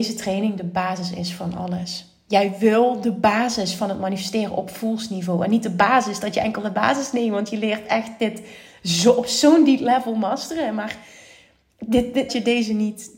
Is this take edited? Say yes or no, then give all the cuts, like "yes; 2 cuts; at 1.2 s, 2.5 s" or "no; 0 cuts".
yes; 1 cut; at 12.3 s